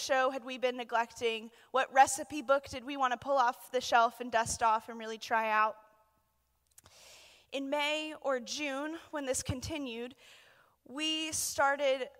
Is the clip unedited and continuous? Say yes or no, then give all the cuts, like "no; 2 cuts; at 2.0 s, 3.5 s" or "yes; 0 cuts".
yes; 0 cuts